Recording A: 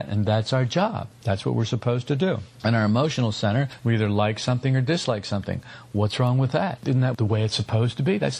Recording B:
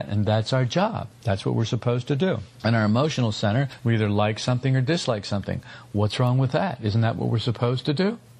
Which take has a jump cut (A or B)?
A